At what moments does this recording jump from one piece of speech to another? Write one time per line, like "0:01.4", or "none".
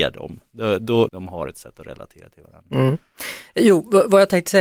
0:01.1